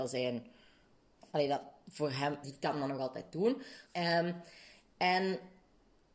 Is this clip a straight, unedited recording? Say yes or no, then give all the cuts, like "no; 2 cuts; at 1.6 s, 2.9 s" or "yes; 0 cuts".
no; 2 cuts; at 2.4 s, 3.9 s